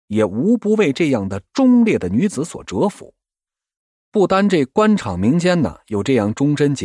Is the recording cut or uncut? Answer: uncut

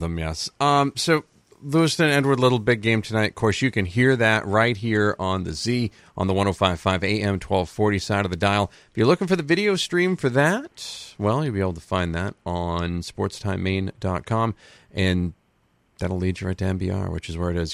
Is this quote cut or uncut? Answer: uncut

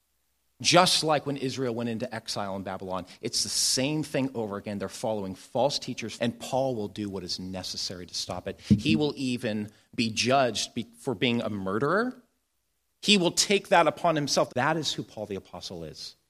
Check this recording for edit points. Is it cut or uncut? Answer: cut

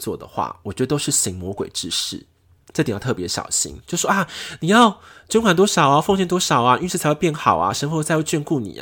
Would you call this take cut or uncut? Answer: uncut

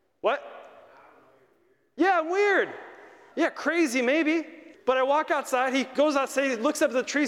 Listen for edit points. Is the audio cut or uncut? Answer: cut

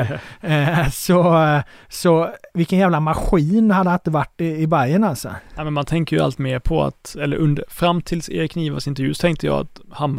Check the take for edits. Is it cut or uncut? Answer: uncut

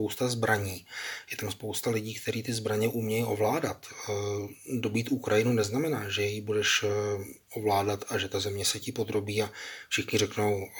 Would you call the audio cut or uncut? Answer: uncut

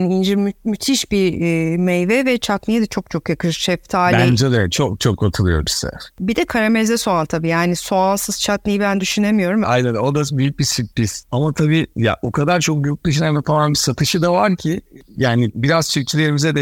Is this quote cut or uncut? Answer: cut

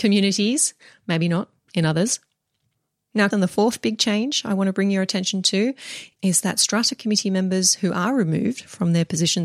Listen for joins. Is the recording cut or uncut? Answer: cut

